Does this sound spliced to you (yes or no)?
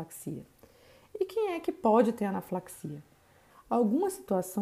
yes